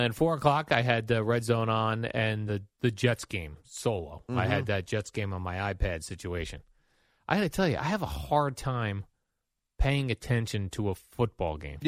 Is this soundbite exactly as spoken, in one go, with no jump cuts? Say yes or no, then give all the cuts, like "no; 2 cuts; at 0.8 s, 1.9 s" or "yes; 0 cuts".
no; 1 cut; at 2.5 s